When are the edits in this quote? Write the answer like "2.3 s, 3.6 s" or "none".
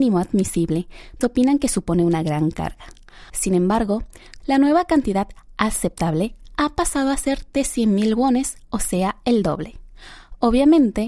1.2 s, 3.3 s, 4.4 s